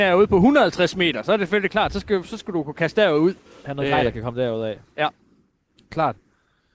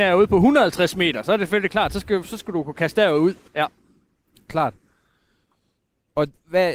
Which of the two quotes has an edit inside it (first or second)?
second